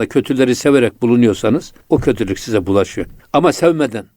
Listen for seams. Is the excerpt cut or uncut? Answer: cut